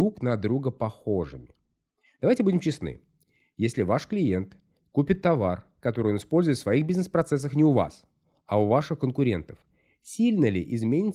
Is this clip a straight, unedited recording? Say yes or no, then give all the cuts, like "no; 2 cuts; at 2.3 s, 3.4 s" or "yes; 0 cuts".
yes; 0 cuts